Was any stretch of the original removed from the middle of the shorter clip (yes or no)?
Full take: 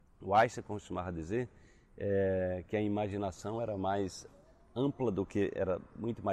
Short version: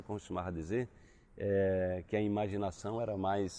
no